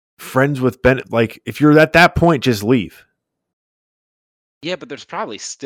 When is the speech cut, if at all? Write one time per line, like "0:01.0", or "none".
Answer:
none